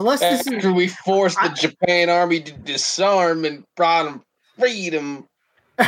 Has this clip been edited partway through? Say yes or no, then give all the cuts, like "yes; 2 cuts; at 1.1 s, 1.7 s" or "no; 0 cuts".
no; 0 cuts